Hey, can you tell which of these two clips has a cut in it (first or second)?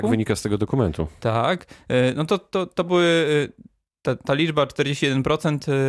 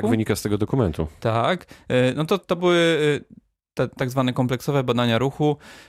second